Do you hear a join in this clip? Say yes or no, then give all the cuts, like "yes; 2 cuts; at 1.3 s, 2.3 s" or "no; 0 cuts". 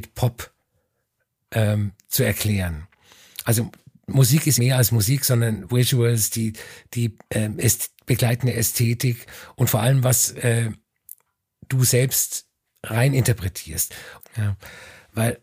yes; 2 cuts; at 4.6 s, 14.2 s